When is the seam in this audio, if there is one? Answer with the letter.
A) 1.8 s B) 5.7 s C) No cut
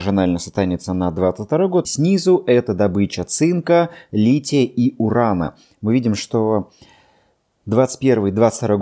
A